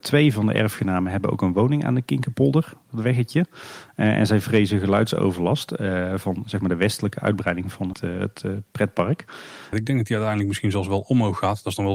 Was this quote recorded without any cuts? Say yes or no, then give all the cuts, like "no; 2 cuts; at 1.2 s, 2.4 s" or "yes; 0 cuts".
no; 2 cuts; at 7.9 s, 9.7 s